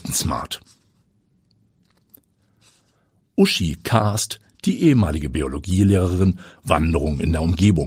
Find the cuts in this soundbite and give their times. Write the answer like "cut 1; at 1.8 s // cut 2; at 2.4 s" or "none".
cut 1; at 6.6 s